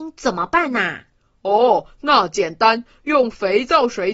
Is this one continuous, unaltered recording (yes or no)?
yes